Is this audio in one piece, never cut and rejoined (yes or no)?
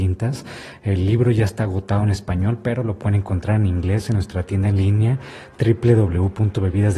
yes